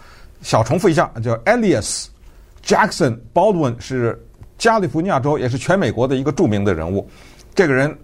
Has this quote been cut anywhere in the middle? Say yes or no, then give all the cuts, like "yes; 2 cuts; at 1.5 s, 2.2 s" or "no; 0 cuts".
no; 0 cuts